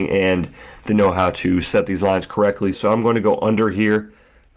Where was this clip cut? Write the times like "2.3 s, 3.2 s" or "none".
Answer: 2.7 s